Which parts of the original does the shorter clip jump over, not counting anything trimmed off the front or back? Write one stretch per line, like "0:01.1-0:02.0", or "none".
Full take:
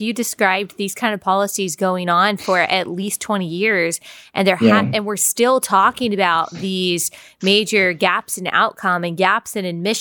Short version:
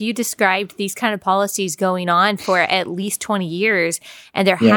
none